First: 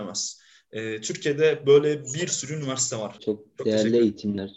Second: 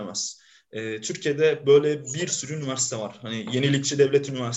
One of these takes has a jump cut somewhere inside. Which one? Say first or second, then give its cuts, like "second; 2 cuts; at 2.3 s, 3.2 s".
first; 1 cut; at 3.2 s